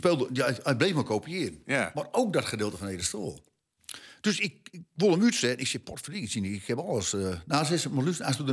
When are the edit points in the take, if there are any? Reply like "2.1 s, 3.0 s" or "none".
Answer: none